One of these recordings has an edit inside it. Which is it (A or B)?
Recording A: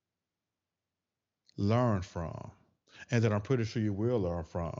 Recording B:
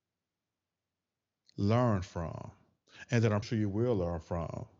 B